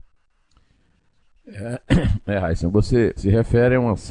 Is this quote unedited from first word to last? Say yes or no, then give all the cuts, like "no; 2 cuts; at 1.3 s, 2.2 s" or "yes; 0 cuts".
no; 1 cut; at 3.2 s